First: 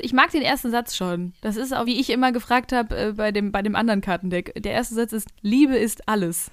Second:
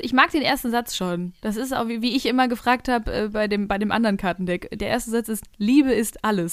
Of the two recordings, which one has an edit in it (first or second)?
first